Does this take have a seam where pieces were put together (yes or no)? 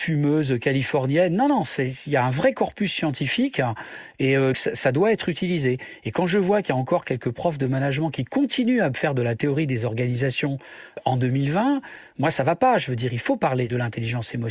yes